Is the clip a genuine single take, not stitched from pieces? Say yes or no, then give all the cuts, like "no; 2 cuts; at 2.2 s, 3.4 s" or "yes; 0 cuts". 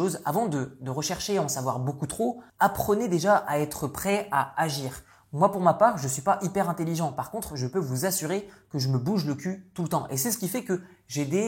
no; 1 cut; at 2.5 s